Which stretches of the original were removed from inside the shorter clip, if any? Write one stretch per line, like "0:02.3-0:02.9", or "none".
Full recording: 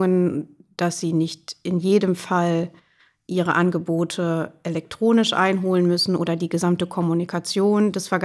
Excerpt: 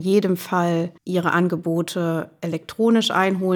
0:02.8-0:03.2